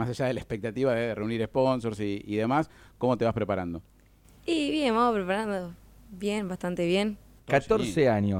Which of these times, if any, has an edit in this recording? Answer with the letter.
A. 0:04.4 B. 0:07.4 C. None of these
B